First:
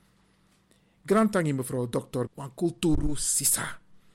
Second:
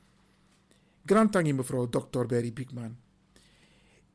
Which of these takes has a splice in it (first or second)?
first